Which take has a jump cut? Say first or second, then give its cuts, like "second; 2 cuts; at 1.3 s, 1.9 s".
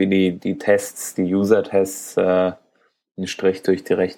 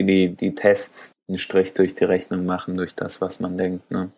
second; 1 cut; at 1.1 s